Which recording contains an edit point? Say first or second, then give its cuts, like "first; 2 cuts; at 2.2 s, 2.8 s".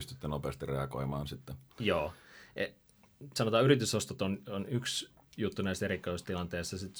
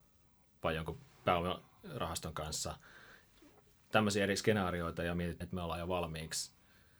second; 1 cut; at 5.4 s